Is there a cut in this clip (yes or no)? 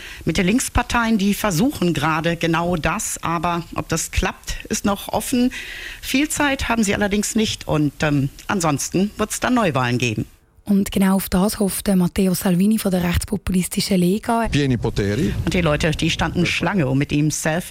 yes